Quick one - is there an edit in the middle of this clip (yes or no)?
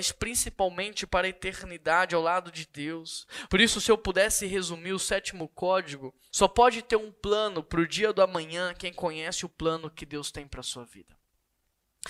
yes